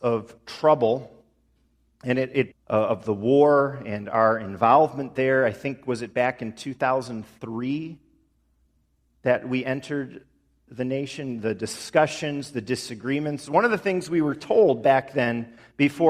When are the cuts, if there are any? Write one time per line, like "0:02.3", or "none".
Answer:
0:02.5